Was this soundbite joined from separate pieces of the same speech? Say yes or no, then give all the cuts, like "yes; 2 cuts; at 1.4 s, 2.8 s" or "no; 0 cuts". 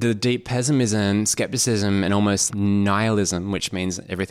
yes; 1 cut; at 2.5 s